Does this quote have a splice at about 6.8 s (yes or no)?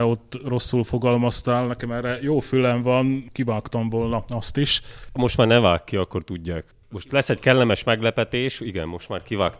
no